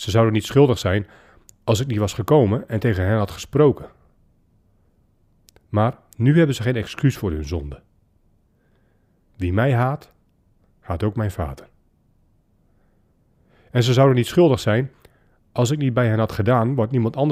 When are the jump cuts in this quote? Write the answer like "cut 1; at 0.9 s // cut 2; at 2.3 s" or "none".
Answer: none